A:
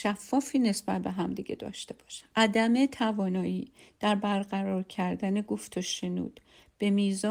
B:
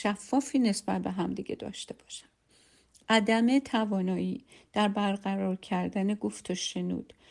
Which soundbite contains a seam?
A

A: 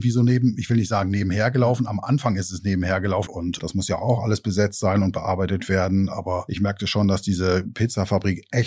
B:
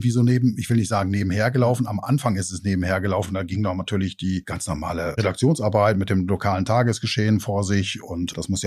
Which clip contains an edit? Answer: A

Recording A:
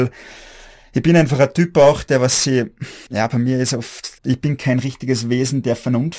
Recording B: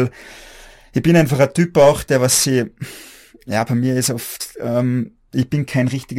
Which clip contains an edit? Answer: A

